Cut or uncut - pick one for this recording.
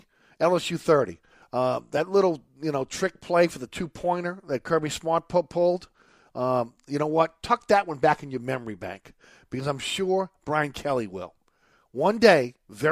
uncut